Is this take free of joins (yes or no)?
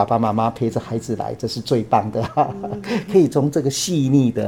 yes